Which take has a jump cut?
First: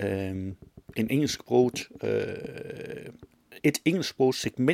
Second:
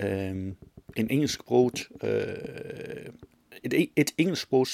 first; 1 cut; at 3.6 s

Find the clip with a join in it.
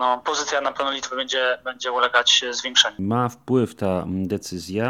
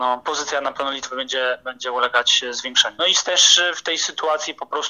second; 1 cut; at 3.0 s

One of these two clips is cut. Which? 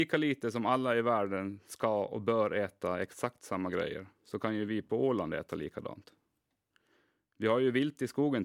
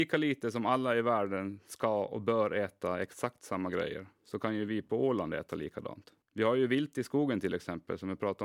second; 1 cut; at 6.2 s

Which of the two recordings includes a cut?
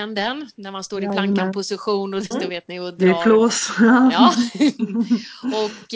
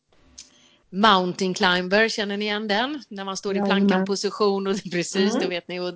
first; 1 cut; at 2.3 s

